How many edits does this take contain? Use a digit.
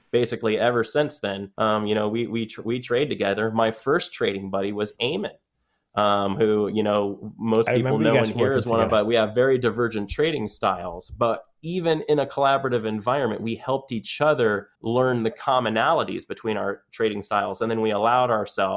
3